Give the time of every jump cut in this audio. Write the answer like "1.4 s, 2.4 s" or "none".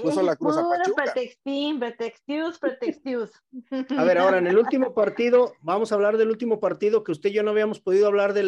none